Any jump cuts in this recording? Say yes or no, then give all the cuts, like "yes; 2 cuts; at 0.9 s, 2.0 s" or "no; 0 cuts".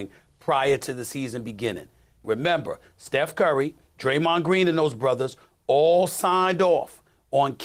yes; 2 cuts; at 2.2 s, 3.9 s